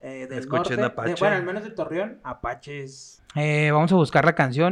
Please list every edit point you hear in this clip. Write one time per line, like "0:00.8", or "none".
0:03.2